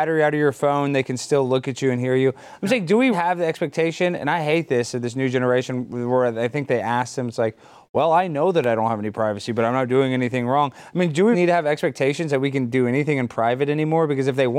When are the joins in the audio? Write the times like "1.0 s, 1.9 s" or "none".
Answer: 3.1 s, 11.3 s